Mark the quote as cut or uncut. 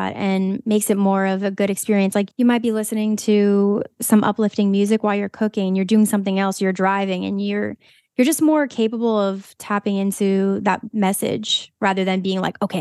uncut